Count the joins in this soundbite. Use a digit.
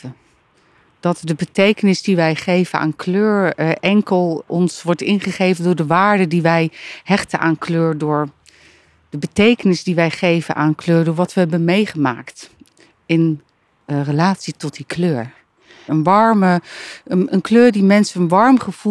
3